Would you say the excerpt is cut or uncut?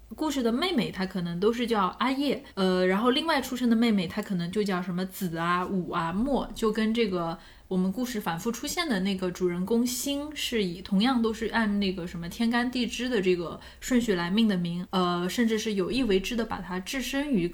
cut